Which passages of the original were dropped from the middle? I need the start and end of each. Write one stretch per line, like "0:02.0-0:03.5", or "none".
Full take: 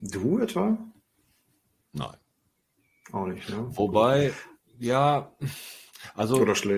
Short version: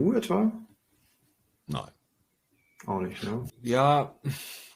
0:03.8-0:04.7